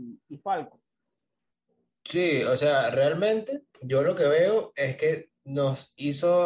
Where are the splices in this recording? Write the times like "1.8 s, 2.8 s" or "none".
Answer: 3.7 s